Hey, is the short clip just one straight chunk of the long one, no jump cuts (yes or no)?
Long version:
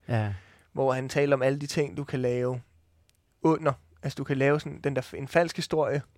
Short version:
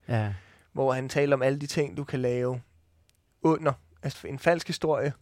no